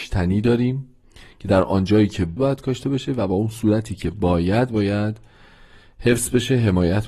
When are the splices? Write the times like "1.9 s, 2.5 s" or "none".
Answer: 2.4 s